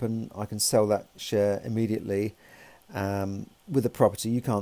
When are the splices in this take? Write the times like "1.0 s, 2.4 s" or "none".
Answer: 3.6 s